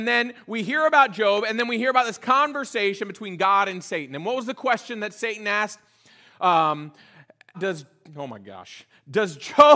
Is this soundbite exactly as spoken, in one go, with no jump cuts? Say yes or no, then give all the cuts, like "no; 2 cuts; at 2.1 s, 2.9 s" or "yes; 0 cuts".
no; 1 cut; at 7.5 s